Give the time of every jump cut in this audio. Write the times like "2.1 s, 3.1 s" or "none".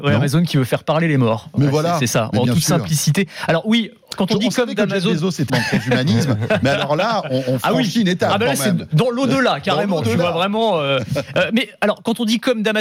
5.5 s

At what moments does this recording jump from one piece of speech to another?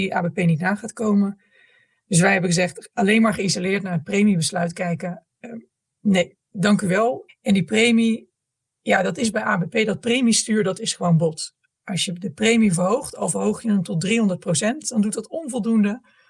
7.3 s

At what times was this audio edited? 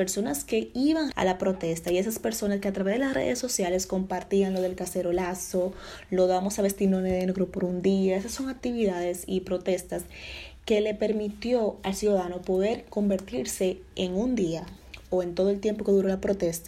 1.1 s

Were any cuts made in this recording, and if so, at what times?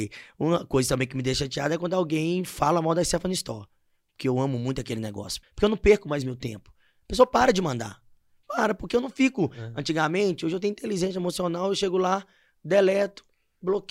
5.4 s

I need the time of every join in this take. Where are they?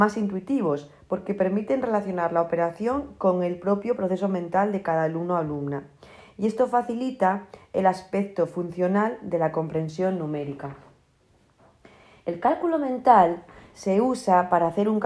none

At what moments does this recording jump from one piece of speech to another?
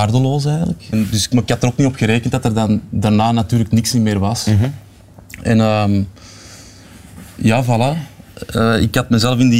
0.9 s

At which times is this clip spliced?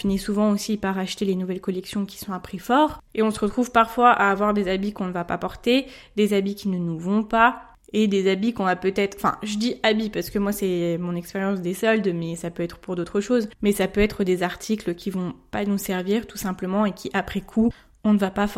3.1 s

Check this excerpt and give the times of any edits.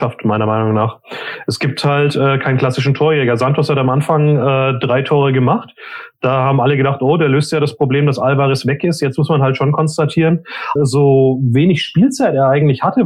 10.8 s

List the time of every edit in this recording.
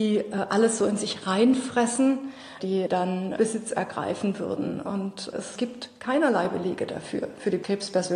2.6 s

